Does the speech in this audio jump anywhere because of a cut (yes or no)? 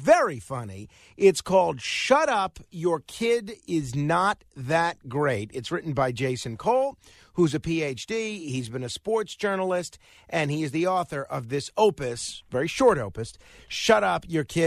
no